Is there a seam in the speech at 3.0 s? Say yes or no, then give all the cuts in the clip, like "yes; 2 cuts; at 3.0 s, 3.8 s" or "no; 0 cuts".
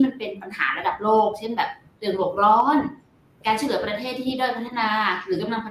no; 0 cuts